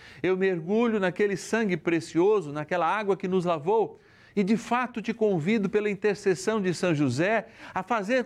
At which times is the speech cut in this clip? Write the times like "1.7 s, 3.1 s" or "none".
none